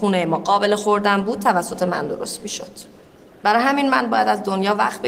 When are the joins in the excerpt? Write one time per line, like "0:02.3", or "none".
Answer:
none